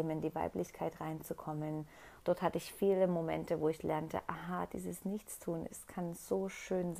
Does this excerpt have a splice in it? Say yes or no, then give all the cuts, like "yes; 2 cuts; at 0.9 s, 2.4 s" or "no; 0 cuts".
yes; 1 cut; at 2.2 s